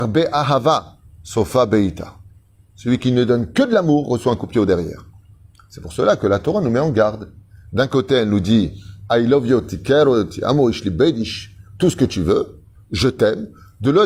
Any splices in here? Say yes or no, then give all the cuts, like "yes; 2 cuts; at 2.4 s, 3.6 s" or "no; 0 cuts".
no; 0 cuts